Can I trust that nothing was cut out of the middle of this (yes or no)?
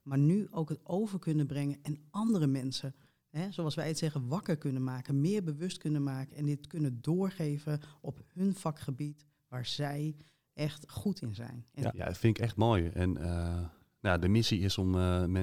no